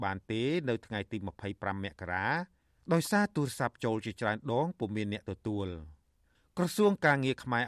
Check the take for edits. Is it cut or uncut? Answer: uncut